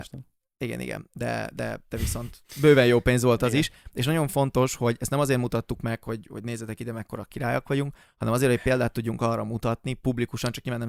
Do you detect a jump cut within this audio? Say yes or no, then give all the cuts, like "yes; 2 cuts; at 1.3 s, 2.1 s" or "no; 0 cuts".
no; 0 cuts